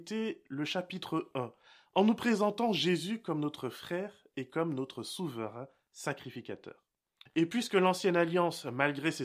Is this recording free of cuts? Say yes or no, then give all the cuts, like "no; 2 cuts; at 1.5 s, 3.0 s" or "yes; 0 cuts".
no; 1 cut; at 7.3 s